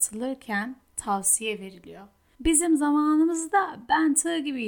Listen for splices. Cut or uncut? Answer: cut